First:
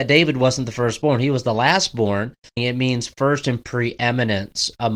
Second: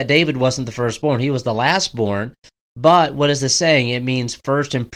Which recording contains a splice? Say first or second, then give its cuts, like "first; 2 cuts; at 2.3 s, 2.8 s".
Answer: first; 1 cut; at 2.6 s